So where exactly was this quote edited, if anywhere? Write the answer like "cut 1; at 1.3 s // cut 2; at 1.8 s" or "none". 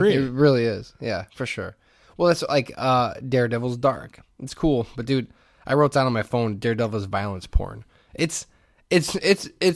none